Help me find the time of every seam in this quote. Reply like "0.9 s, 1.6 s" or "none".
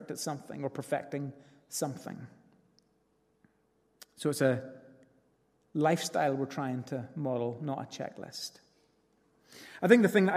none